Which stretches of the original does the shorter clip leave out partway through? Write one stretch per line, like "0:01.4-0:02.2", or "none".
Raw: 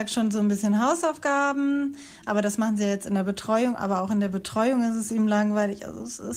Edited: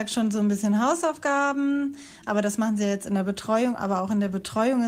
none